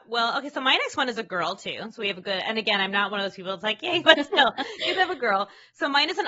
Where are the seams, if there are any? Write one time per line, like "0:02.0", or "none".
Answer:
0:04.1